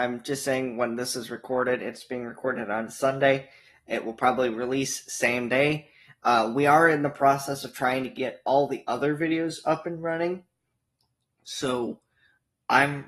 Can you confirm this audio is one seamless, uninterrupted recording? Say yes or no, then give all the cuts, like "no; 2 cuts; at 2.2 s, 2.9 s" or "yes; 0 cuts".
yes; 0 cuts